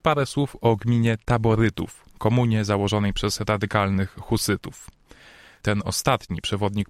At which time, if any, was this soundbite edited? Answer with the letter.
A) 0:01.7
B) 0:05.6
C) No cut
B